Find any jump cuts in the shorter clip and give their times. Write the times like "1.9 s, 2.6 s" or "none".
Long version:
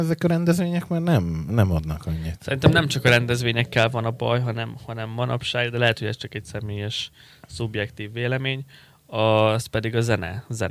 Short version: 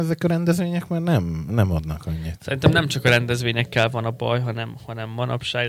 none